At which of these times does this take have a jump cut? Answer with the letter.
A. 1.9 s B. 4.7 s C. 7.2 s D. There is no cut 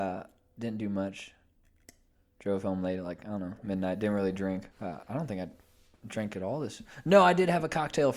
B